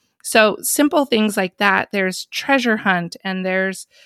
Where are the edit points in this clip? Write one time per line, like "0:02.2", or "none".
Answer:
none